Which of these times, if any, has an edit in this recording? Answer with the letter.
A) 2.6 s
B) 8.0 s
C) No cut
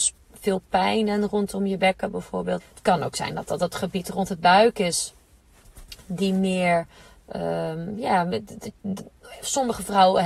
A